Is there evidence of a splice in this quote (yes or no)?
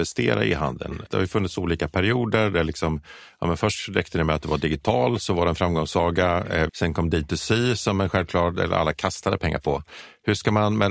yes